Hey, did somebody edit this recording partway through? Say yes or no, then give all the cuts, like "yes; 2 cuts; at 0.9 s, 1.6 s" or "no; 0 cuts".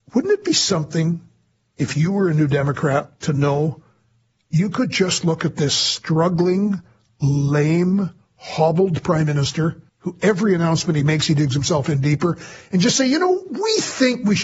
yes; 1 cut; at 9.9 s